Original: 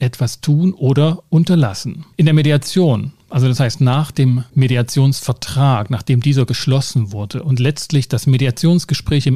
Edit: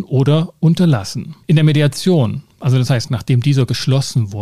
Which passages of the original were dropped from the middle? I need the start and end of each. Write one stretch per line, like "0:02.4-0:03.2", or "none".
0:03.8-0:05.9